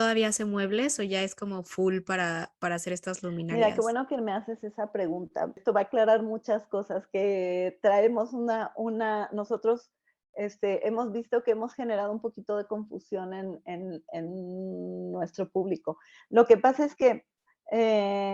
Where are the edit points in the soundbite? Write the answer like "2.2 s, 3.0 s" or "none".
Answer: none